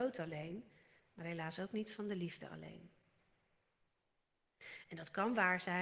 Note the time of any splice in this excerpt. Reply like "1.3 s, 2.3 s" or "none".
4.8 s